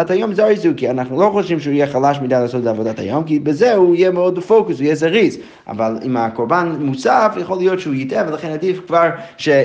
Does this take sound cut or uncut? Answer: cut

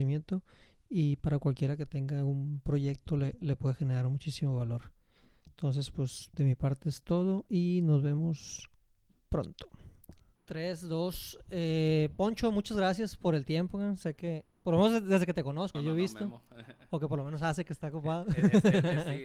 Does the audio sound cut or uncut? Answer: cut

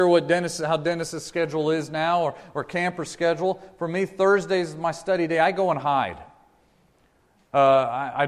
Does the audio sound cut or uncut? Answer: uncut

